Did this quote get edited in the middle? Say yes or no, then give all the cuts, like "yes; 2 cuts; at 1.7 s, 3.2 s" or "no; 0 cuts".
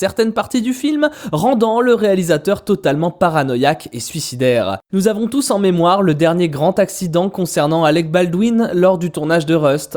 yes; 1 cut; at 4.9 s